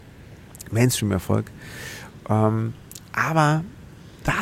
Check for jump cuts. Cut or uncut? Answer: uncut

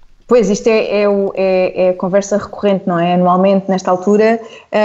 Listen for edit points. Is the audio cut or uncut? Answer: uncut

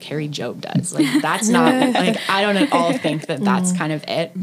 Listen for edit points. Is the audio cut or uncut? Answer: uncut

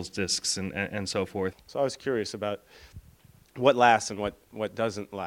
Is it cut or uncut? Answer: cut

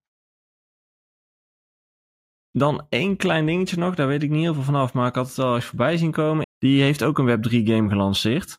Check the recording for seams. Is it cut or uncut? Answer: cut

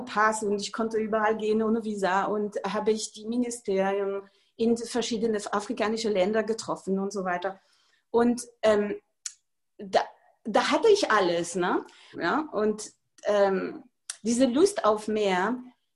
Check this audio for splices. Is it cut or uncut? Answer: cut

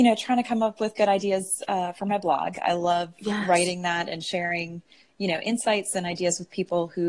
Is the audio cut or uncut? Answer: uncut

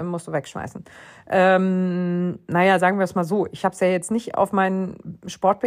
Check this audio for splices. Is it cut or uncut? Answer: uncut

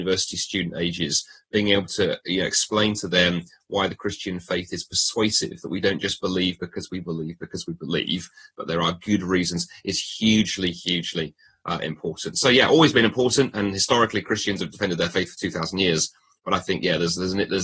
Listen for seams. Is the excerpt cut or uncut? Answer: uncut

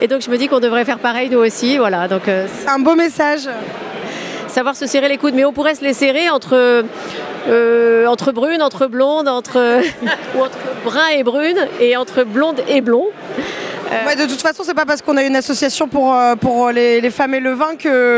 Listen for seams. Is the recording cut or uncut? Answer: uncut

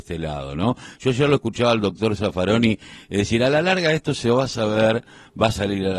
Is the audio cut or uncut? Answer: uncut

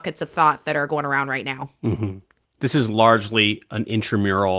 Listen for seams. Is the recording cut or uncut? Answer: uncut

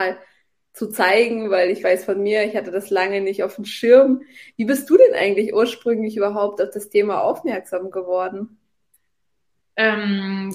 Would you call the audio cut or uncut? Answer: uncut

